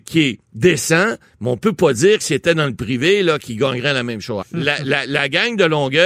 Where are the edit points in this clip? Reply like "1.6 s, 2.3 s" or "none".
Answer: 4.4 s